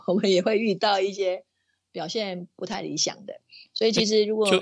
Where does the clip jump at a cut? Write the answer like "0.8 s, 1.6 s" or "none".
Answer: none